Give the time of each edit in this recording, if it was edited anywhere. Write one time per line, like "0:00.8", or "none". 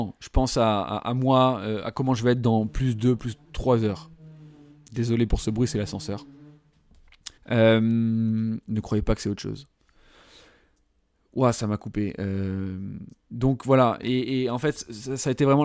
0:07.4